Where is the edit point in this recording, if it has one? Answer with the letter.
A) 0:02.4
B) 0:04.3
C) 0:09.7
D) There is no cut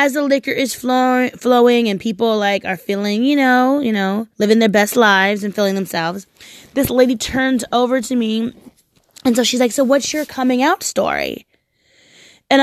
B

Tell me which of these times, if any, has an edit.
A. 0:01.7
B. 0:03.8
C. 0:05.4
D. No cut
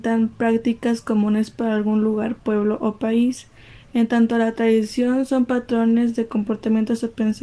D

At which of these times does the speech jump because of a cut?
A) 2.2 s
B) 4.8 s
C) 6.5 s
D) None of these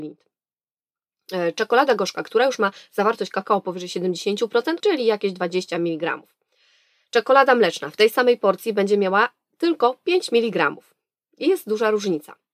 B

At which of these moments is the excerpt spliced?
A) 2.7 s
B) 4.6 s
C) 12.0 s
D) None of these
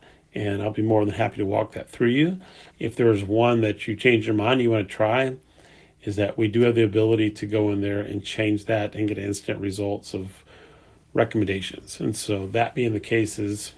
A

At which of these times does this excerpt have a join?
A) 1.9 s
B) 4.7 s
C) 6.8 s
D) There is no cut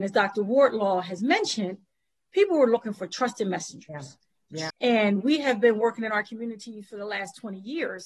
B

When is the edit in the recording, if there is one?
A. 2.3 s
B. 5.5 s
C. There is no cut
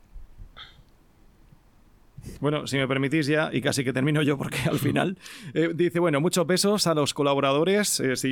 A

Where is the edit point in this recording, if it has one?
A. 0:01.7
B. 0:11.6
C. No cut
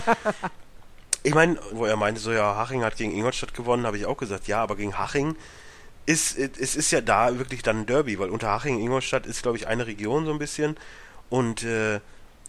A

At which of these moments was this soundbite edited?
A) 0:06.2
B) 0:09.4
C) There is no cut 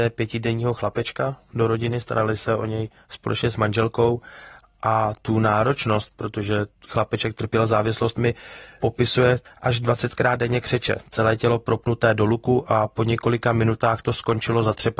B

